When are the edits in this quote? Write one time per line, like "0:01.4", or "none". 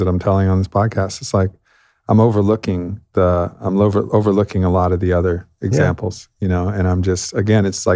none

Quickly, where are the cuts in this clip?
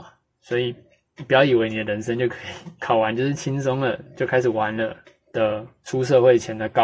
0:05.3

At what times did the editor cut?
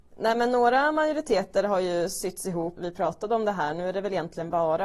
0:02.8

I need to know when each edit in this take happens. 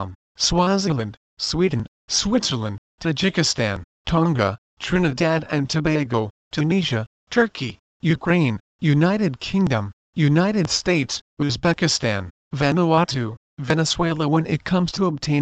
0:11.3

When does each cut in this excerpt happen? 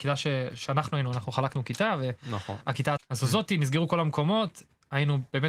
0:03.0

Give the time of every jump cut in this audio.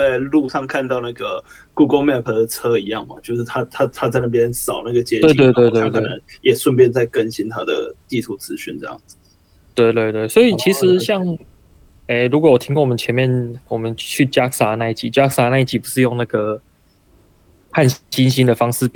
none

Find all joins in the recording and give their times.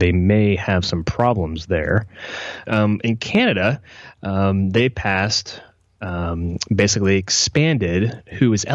0:02.7

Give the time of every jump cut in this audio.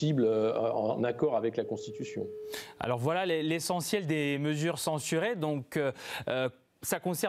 none

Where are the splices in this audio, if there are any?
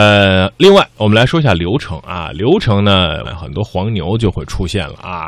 0:03.2

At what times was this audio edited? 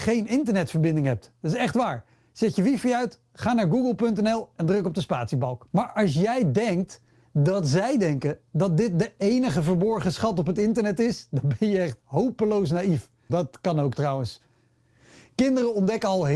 0:05.7
0:13.3

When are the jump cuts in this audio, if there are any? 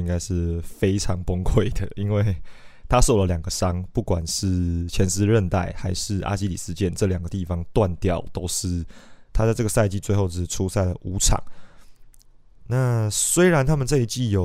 0:09.3

